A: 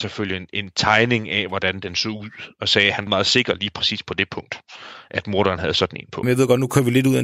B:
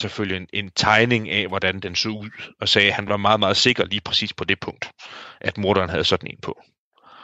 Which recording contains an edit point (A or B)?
A